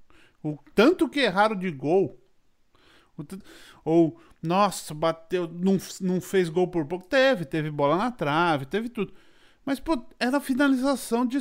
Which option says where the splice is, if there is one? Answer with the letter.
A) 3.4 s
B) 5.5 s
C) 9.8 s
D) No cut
A